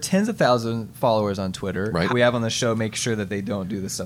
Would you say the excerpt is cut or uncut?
cut